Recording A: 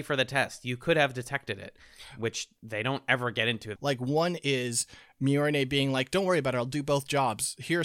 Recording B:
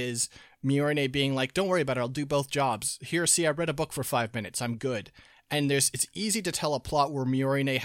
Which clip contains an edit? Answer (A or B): A